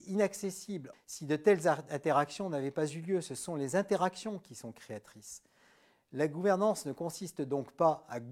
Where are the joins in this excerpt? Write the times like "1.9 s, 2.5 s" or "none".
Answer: 0.9 s